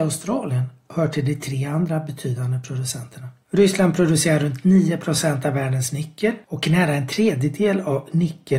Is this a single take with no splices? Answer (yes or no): no